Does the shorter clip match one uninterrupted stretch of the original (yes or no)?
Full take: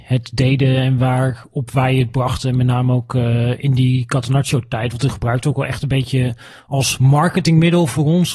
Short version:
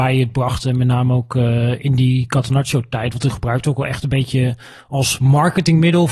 yes